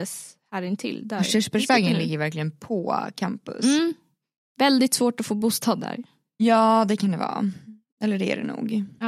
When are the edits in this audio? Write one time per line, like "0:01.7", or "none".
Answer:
none

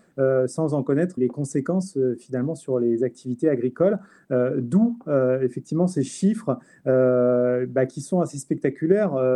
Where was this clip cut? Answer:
0:01.2

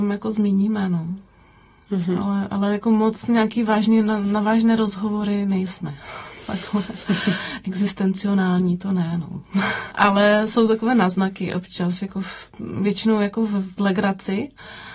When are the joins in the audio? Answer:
0:09.9

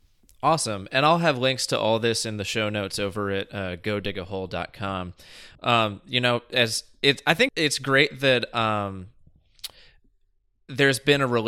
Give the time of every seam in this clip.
0:05.6
0:07.5

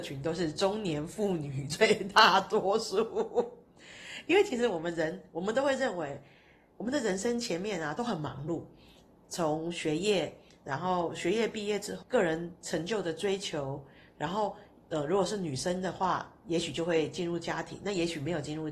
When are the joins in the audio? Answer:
0:12.0

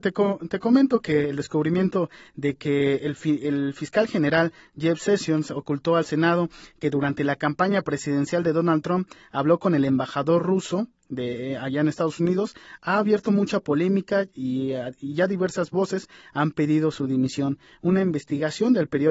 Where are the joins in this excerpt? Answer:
none

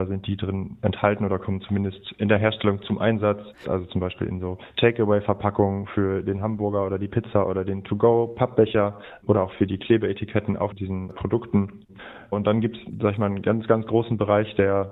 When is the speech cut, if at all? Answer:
0:03.6

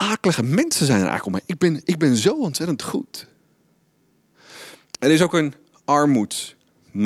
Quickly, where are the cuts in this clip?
0:04.9

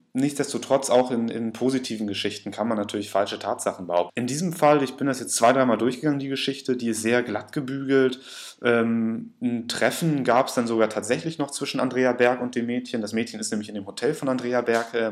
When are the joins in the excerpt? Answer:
0:04.1

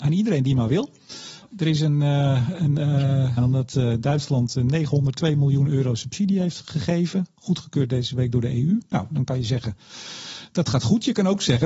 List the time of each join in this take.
0:03.4

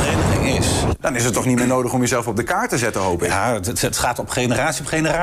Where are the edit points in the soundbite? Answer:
0:01.0

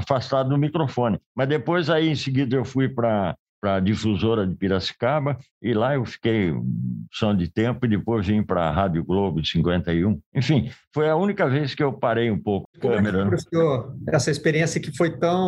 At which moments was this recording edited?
0:12.6

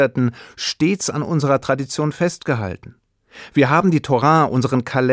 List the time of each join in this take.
none

